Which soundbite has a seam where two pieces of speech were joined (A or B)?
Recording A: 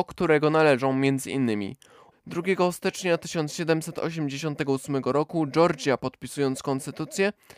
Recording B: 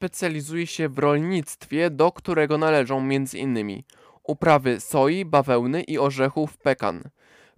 A